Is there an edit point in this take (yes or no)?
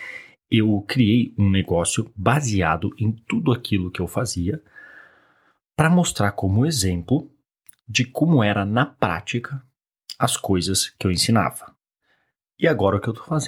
no